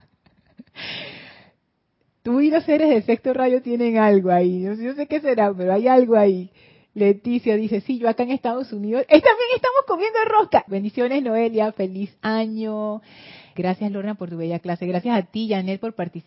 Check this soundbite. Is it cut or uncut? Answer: cut